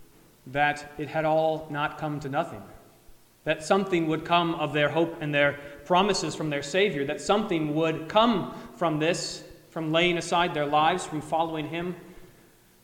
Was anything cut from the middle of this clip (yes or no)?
no